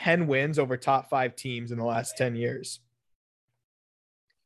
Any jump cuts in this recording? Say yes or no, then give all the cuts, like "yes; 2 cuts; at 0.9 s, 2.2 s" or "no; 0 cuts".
no; 0 cuts